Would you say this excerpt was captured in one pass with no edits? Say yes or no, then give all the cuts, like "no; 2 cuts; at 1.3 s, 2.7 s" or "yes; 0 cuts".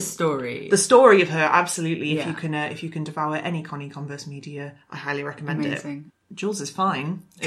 no; 1 cut; at 6.2 s